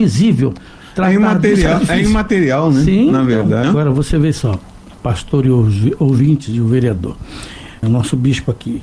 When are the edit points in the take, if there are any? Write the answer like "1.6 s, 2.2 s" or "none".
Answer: 3.6 s, 7.8 s